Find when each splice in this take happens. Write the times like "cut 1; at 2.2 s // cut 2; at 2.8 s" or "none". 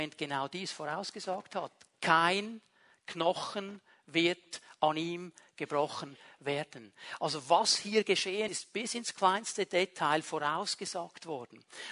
cut 1; at 8.5 s